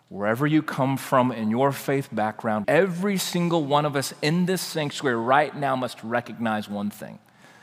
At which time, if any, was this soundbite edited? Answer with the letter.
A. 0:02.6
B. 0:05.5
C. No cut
A